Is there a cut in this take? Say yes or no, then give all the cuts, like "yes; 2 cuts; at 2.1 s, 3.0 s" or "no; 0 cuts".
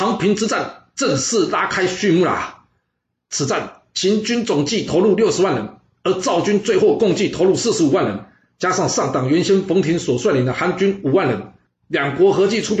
no; 0 cuts